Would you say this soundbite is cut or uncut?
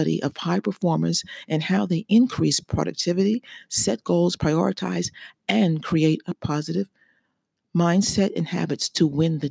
uncut